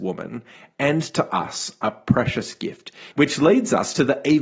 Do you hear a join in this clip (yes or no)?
yes